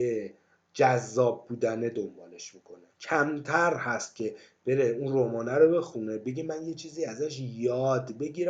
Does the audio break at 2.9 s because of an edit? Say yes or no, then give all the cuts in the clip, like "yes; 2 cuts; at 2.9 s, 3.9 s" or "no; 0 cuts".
yes; 1 cut; at 2.9 s